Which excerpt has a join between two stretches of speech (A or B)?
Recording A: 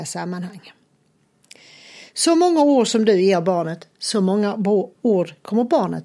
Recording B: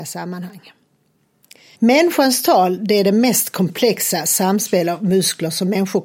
B